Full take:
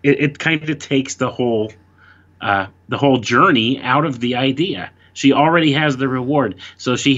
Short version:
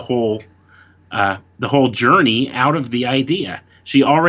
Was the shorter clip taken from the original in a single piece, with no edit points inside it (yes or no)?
yes